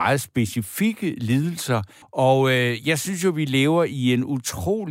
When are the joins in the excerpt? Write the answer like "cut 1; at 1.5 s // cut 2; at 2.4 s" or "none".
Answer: cut 1; at 2.0 s